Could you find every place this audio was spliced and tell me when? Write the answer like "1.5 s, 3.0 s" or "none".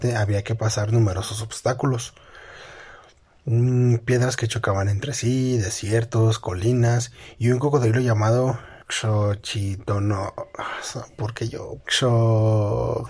8.8 s, 11.8 s